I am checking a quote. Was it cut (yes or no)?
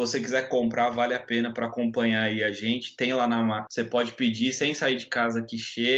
yes